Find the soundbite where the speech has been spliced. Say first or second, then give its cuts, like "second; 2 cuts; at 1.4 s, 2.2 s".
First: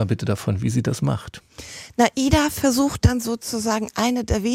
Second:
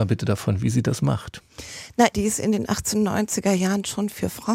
second; 1 cut; at 2.1 s